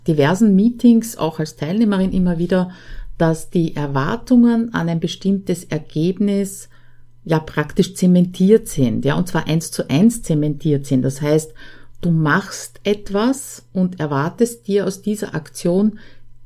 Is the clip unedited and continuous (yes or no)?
yes